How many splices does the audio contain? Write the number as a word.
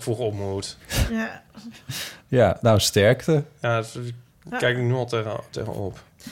zero